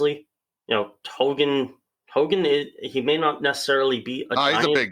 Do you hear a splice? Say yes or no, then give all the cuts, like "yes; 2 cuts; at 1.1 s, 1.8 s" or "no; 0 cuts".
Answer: no; 0 cuts